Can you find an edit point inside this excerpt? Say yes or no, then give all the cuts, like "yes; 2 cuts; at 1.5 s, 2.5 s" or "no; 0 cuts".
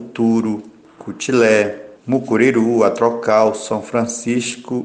yes; 1 cut; at 2.0 s